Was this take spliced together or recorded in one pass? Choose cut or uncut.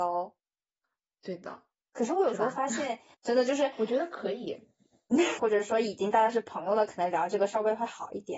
cut